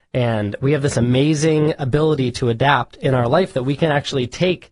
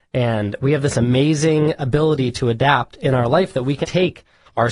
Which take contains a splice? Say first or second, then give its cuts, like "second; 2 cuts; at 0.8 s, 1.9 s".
second; 1 cut; at 3.8 s